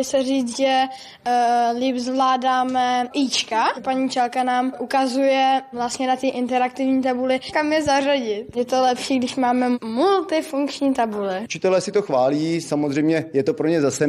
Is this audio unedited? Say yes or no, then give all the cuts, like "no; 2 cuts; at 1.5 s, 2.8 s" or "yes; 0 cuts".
yes; 0 cuts